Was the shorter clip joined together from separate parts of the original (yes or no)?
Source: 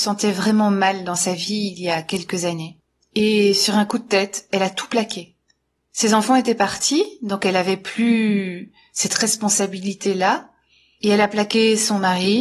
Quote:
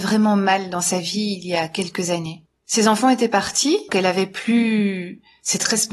yes